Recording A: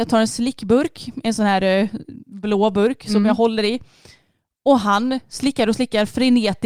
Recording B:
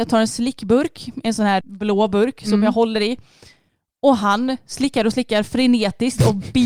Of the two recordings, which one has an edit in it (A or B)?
B